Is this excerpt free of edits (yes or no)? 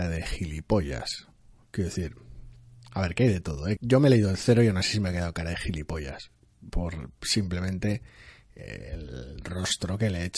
no